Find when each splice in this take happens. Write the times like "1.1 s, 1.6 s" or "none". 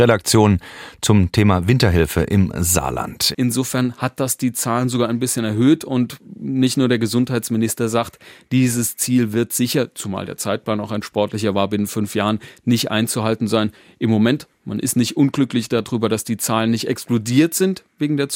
3.3 s